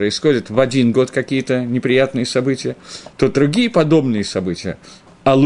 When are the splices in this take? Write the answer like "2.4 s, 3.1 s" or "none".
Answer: none